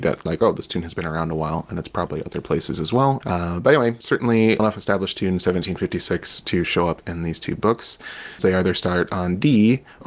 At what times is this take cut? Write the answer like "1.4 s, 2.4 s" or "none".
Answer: 3.2 s, 4.6 s, 8.4 s